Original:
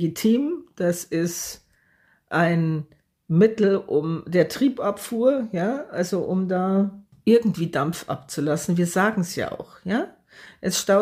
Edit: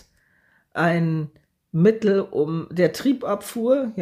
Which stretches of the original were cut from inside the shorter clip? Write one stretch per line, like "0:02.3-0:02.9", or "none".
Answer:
none